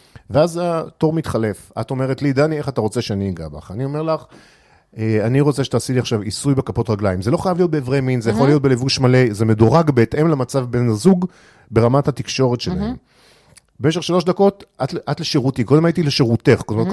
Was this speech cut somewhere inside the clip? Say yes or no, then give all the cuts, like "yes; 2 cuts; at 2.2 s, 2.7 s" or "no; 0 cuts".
no; 0 cuts